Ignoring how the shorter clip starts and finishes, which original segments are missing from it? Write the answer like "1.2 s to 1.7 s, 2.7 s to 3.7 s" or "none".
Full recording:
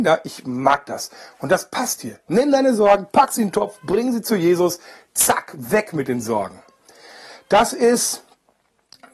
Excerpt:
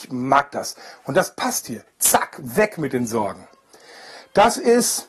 2.2 s to 5.0 s